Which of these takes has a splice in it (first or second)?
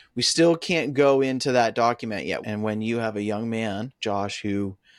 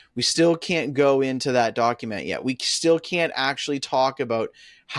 first